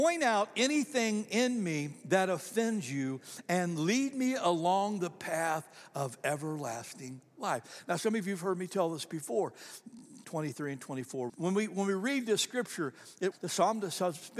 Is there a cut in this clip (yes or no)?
yes